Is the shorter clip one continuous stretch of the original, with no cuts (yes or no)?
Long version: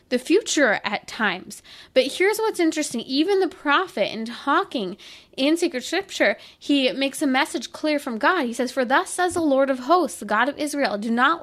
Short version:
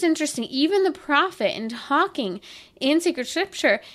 yes